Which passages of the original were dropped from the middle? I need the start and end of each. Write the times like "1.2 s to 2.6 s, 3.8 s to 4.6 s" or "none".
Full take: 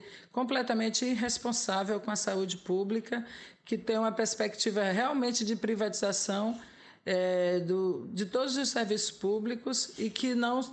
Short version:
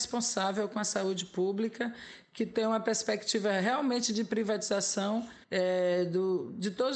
6.7 s to 7.0 s